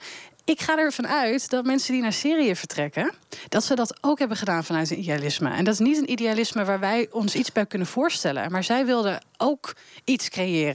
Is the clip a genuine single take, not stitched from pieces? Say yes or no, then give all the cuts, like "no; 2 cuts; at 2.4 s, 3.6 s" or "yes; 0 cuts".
yes; 0 cuts